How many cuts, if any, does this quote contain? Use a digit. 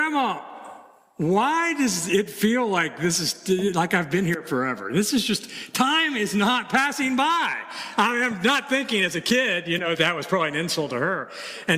1